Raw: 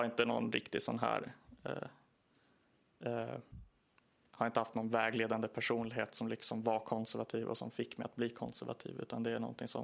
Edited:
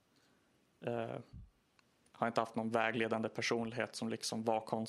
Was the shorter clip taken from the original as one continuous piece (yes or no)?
yes